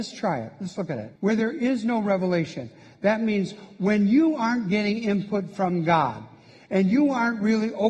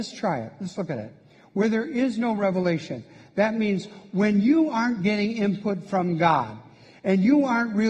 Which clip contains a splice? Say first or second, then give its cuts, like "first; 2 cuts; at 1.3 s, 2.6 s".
first; 1 cut; at 1.2 s